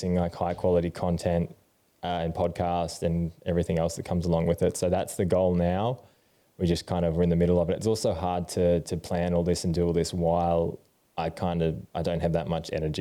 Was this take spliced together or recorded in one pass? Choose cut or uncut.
uncut